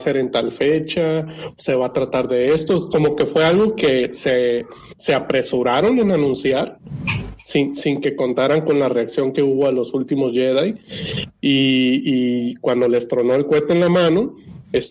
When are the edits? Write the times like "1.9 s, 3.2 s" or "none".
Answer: none

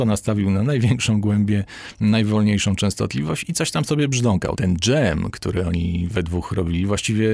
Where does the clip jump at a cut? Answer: 4.5 s

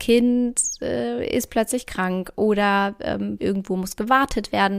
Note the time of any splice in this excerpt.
3.4 s

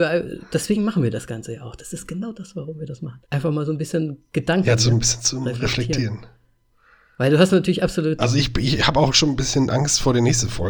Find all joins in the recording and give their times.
3.2 s

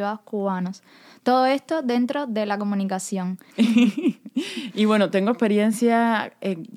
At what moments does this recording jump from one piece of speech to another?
3.5 s

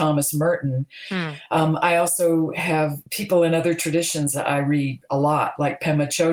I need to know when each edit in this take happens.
3.1 s

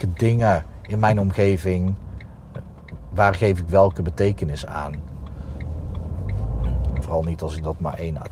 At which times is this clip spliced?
7.0 s

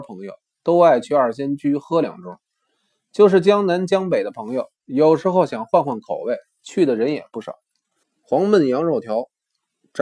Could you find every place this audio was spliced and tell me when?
8.0 s

